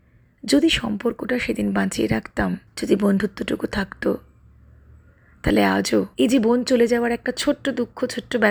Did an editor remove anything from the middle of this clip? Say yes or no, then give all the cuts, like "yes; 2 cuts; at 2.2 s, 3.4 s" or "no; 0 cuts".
yes; 2 cuts; at 2.7 s, 6.1 s